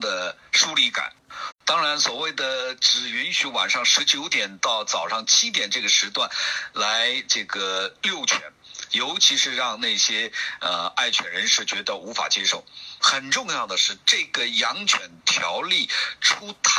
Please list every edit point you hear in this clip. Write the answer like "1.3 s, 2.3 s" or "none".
1.5 s, 8.9 s, 13.0 s